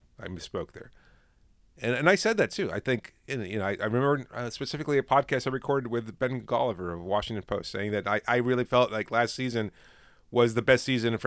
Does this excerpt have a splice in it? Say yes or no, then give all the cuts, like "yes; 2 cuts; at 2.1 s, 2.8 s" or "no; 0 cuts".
no; 0 cuts